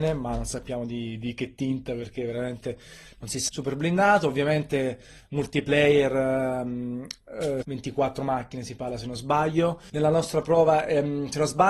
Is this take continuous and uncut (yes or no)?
no